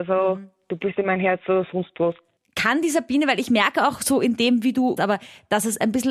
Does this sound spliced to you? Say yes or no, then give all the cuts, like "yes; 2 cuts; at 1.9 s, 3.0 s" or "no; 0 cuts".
yes; 1 cut; at 5.0 s